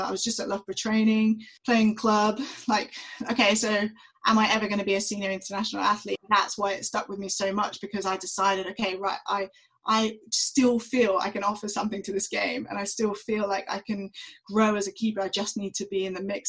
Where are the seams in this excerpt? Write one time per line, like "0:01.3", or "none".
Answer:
0:01.6
0:06.2